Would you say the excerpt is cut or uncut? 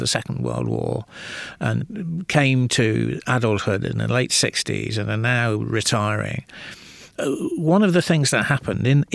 uncut